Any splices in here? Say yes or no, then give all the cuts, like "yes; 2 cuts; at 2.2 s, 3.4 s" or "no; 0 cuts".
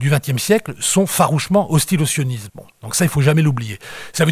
yes; 1 cut; at 2.5 s